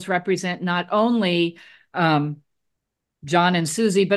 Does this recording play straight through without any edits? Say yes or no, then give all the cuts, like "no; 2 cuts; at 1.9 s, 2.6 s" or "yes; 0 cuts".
yes; 0 cuts